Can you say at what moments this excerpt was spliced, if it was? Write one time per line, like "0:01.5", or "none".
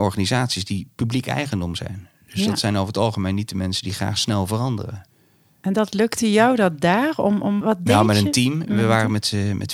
0:07.6